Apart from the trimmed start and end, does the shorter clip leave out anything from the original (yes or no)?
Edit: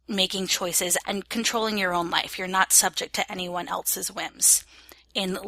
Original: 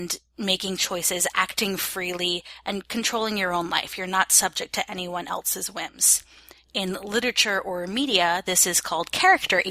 yes